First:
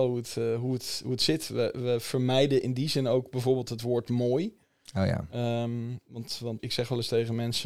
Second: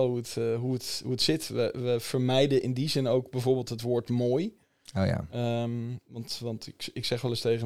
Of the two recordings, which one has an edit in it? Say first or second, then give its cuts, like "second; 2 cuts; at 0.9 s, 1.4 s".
first; 1 cut; at 6.6 s